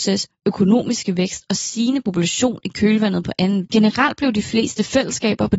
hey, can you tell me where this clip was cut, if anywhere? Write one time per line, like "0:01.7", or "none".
0:03.6